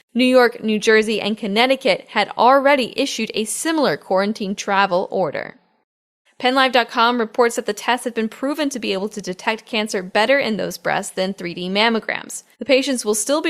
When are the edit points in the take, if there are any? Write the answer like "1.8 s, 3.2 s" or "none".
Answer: 6.3 s, 12.5 s